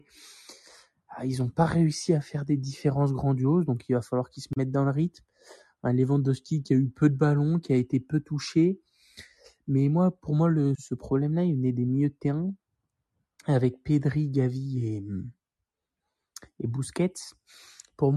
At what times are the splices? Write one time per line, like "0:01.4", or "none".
0:10.7